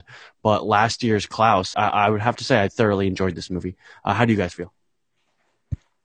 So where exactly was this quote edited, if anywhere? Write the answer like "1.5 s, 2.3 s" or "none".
1.7 s